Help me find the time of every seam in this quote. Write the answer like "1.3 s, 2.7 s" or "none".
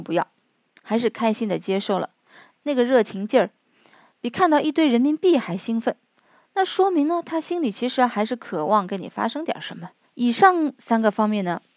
2.6 s, 10.0 s